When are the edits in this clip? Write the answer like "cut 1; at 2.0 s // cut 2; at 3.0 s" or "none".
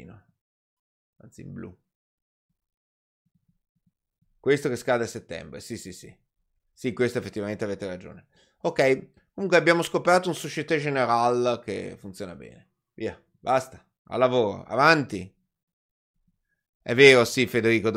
none